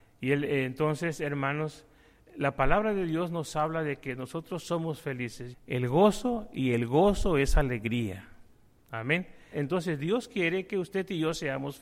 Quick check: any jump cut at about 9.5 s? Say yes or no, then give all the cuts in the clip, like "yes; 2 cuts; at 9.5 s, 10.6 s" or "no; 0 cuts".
yes; 2 cuts; at 5.5 s, 9.5 s